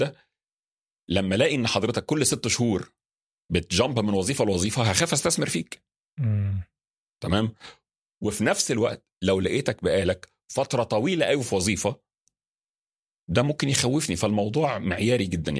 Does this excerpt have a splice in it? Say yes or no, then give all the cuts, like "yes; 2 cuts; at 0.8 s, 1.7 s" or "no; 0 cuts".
no; 0 cuts